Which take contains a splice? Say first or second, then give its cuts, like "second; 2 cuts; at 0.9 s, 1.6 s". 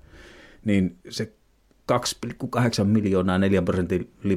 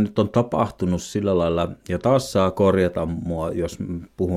first; 1 cut; at 1.0 s